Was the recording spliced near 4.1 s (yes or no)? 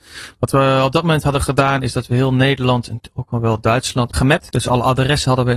yes